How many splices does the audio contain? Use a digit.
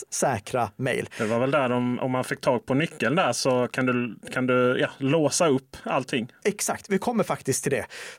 1